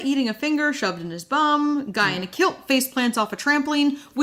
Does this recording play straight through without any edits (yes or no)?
yes